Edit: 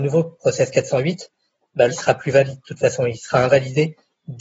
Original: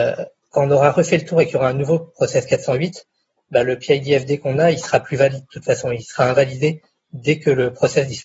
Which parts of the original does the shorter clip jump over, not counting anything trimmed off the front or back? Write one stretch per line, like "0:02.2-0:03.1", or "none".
0:03.6-0:04.7